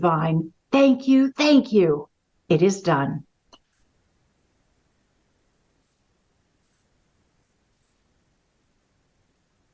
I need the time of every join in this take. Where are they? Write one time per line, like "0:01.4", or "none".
0:01.3